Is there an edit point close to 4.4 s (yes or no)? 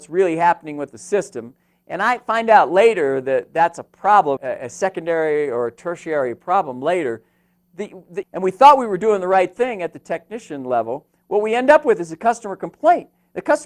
yes